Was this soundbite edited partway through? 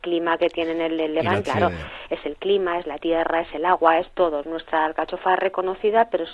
yes; 2 cuts; at 1.4 s, 4.4 s

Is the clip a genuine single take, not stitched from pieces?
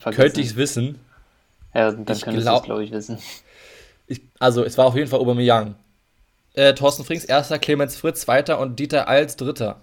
no; 2 cuts; at 4.3 s, 6.4 s

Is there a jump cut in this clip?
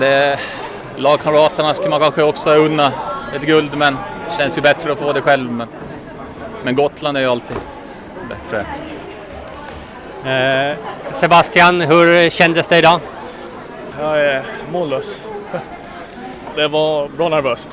yes; 2 cuts; at 13.9 s, 16.5 s

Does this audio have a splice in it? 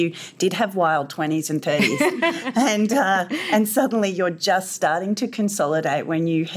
no; 0 cuts

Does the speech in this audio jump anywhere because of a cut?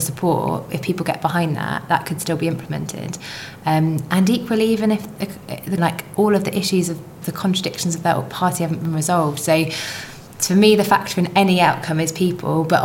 yes; 1 cut; at 5.8 s

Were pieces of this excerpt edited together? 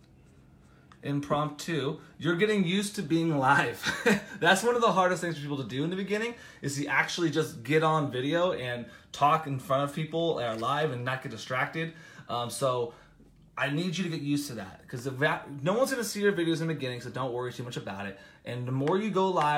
no; 0 cuts

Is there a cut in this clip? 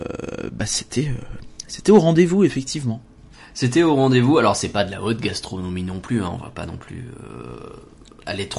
no; 0 cuts

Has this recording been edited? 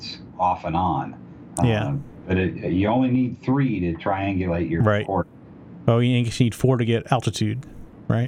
no; 0 cuts

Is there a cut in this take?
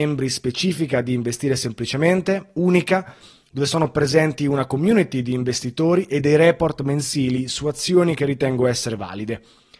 no; 0 cuts

